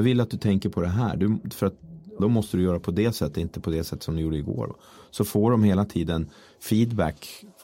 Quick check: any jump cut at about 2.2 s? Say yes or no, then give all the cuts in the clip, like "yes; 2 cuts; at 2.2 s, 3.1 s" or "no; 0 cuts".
yes; 1 cut; at 2.2 s